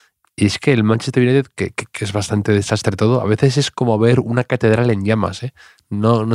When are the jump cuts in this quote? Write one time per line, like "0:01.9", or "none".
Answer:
0:01.9